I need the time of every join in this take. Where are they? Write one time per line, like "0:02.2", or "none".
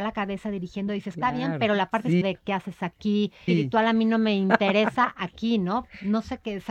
0:02.2
0:03.5

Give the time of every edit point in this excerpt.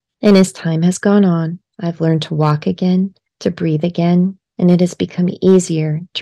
none

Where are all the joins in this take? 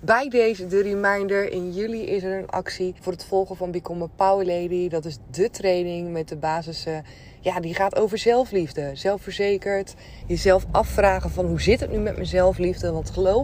0:03.0
0:10.2

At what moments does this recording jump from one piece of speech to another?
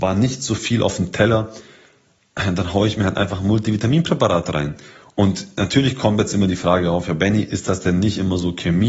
none

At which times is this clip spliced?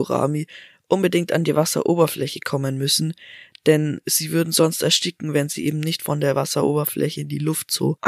none

